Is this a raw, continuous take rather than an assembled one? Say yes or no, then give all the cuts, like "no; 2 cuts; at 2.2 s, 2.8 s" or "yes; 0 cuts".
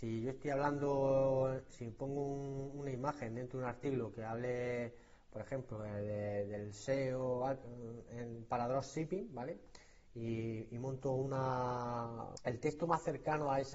no; 1 cut; at 12.4 s